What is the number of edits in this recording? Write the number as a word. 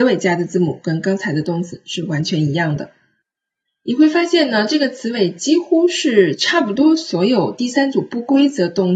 zero